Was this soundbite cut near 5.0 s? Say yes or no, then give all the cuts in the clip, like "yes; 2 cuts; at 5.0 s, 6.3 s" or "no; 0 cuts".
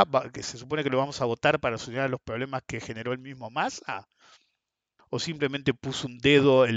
yes; 1 cut; at 5.0 s